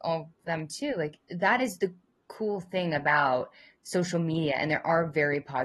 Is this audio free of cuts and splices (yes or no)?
yes